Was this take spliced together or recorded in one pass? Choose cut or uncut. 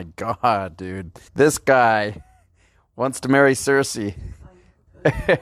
cut